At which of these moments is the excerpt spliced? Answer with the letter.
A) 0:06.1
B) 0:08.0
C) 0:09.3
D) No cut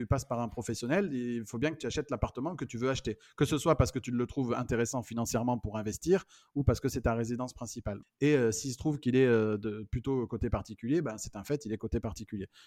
B